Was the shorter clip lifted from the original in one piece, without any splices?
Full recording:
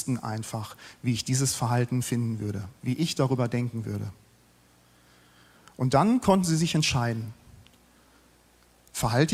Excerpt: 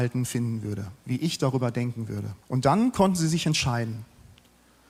no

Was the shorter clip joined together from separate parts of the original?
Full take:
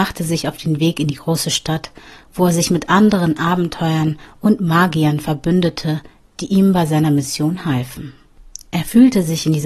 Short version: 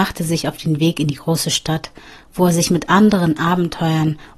no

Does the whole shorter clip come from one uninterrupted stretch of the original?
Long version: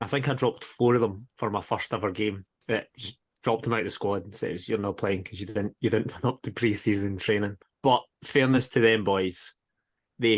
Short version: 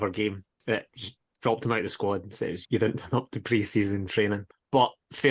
no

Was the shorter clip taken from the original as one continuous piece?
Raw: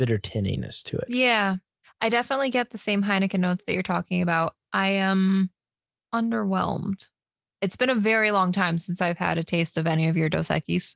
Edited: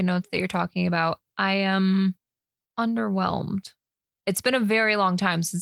yes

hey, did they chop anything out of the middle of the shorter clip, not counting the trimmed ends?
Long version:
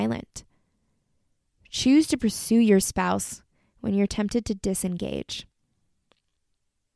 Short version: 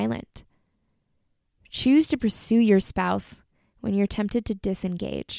no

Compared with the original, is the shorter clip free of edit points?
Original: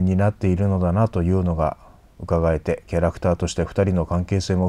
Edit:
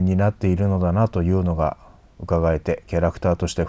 yes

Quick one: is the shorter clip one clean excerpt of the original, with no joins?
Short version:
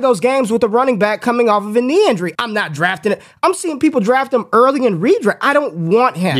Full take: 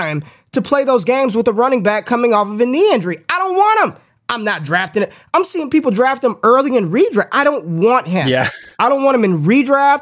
no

